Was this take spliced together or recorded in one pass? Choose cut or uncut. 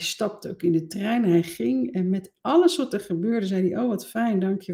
uncut